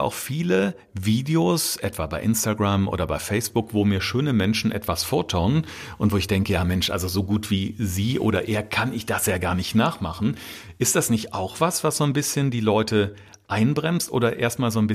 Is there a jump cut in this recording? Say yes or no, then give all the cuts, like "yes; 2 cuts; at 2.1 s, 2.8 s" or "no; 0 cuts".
no; 0 cuts